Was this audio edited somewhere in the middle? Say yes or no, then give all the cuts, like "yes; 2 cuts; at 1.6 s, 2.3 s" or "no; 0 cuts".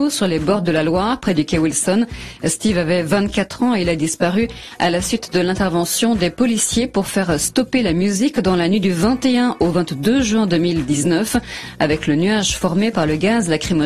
no; 0 cuts